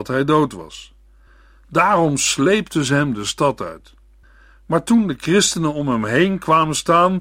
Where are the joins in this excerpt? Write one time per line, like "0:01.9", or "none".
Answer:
none